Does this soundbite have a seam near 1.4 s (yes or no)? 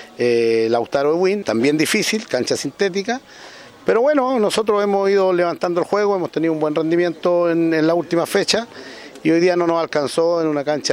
yes